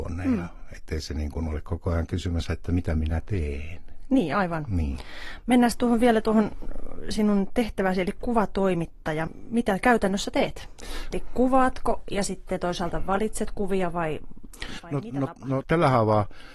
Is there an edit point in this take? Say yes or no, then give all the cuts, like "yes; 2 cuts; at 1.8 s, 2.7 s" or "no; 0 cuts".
yes; 2 cuts; at 11.1 s, 15.6 s